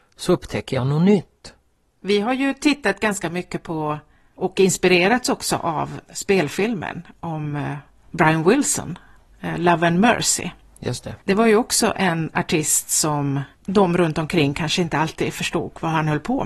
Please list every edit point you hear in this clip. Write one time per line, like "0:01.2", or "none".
0:11.2
0:13.5